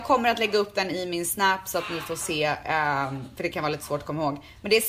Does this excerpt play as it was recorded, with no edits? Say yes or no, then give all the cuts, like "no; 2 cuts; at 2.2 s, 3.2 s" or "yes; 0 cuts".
yes; 0 cuts